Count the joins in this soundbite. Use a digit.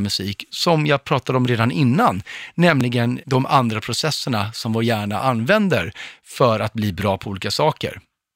1